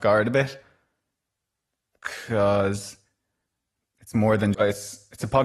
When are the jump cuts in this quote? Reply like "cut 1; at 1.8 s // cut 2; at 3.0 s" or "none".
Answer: cut 1; at 4.5 s